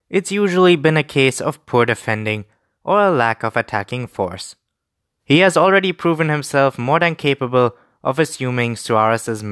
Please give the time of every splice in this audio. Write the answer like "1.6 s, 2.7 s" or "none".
5.2 s